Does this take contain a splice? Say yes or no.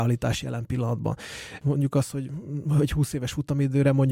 yes